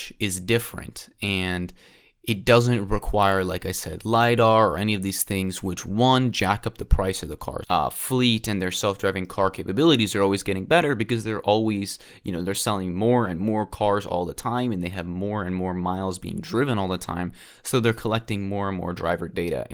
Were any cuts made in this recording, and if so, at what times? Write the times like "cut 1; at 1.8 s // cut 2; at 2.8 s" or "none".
cut 1; at 7.6 s